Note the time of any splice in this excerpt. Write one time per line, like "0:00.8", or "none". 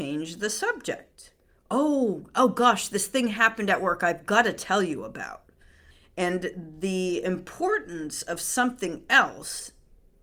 none